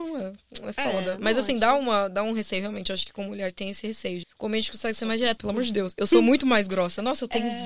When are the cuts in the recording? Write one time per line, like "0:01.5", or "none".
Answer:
0:04.2
0:05.4

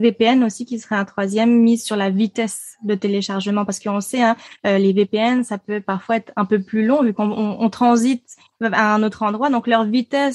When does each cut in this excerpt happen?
none

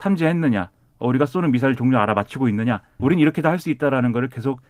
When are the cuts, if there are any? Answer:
0:03.0

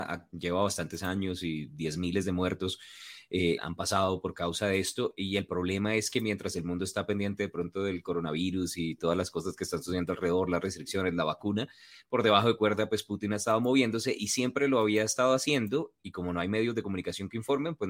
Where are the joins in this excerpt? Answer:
0:03.6

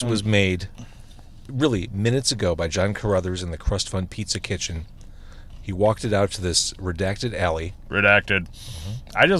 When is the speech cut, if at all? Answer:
none

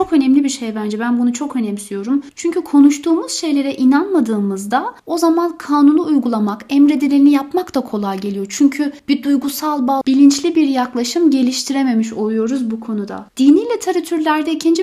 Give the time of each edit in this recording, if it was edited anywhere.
0:10.0

